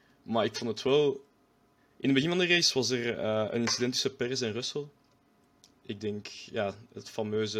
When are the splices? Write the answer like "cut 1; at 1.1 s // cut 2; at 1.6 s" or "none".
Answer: cut 1; at 1.8 s